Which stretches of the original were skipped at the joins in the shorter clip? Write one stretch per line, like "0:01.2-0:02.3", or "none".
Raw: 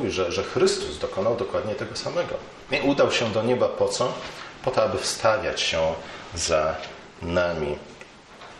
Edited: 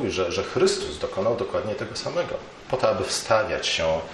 0:02.6-0:04.6